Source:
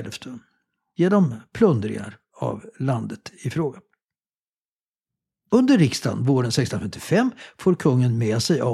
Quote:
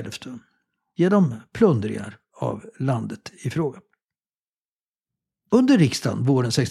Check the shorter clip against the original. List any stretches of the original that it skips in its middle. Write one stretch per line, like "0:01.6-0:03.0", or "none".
none